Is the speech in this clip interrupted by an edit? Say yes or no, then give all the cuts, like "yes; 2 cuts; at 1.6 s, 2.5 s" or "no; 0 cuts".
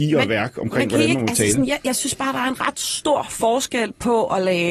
no; 0 cuts